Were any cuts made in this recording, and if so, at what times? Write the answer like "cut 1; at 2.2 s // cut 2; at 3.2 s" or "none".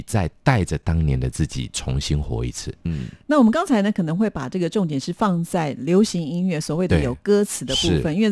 cut 1; at 2.8 s